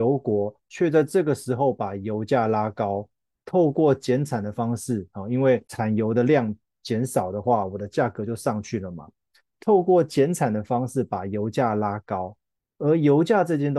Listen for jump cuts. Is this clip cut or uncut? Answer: uncut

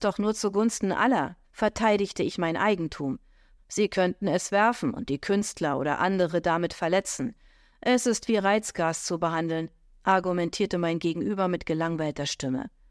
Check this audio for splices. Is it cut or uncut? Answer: cut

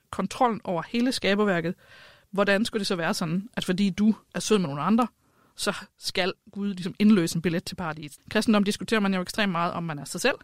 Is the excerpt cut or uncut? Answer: cut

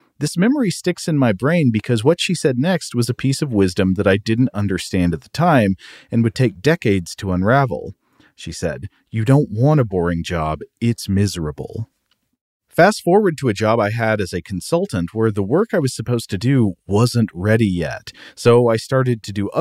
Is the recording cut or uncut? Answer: uncut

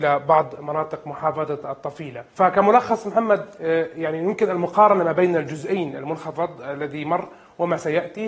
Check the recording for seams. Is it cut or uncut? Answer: cut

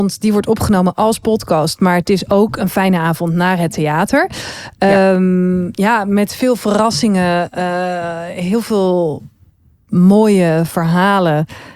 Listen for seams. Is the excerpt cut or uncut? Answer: uncut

